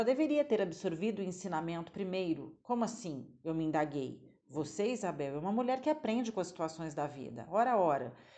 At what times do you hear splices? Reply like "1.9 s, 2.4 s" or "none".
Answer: none